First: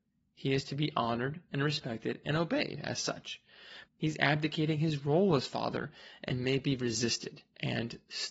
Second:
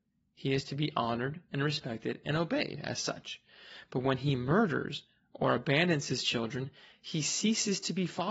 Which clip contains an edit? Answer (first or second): first